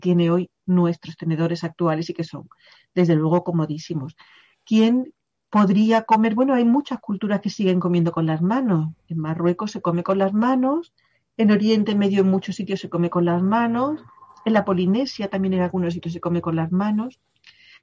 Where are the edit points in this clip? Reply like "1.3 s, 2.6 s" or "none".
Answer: none